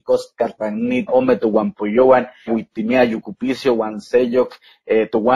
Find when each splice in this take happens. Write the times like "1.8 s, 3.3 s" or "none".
1.1 s, 2.5 s